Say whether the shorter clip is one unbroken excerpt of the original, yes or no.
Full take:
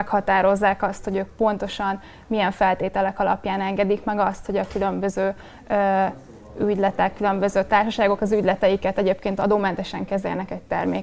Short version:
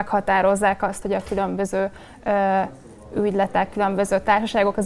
no